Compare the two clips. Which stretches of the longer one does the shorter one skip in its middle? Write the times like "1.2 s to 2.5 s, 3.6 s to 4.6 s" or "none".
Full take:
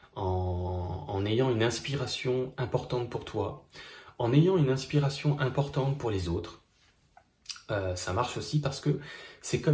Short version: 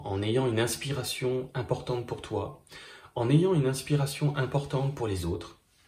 none